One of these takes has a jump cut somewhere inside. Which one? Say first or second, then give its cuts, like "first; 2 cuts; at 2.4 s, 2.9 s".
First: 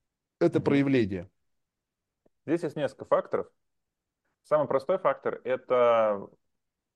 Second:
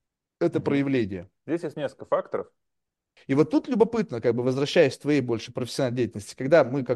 second; 2 cuts; at 1.4 s, 3.2 s